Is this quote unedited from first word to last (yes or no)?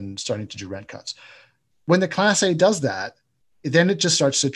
yes